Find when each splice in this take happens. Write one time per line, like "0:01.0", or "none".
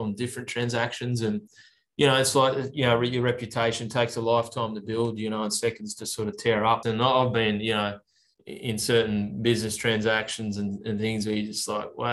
0:06.8